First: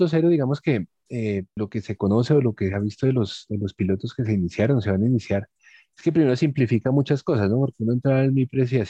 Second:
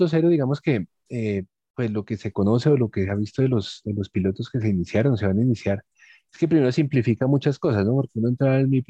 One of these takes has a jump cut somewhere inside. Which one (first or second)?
first